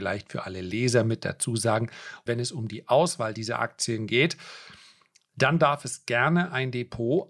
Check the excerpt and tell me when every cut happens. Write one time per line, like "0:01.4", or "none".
0:02.3